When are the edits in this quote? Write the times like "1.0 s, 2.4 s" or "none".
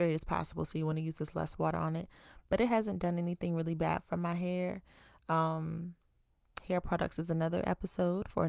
none